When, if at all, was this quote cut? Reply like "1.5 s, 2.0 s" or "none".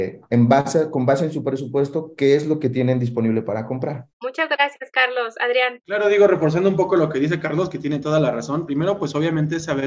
none